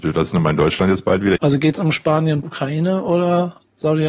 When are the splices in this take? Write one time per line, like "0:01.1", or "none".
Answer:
0:01.4
0:02.4